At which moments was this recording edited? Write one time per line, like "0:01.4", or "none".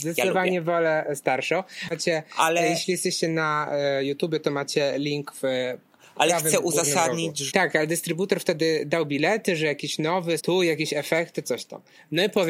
0:01.9
0:07.5
0:10.4